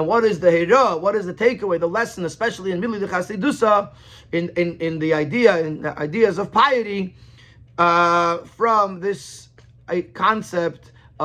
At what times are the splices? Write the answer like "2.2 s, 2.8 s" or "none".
none